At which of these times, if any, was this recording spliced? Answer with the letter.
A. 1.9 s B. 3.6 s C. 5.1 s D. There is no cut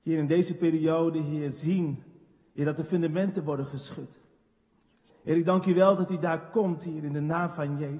C